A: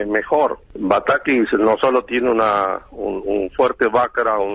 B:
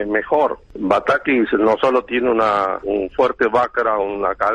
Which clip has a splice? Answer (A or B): B